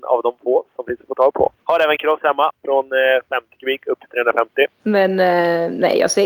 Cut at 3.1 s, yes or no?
no